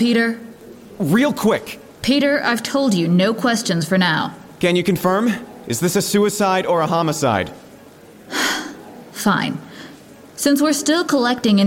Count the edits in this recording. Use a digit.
0